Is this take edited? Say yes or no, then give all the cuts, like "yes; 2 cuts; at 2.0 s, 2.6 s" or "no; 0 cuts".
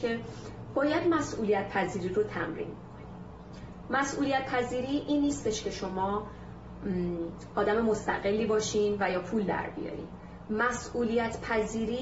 no; 0 cuts